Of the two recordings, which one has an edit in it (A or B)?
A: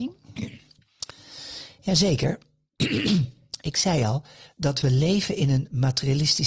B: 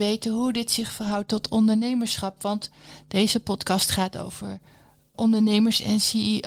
B